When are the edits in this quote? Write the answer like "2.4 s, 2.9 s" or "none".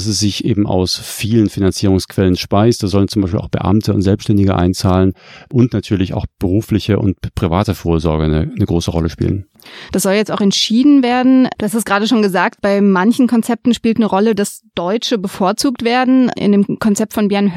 9.9 s, 11.6 s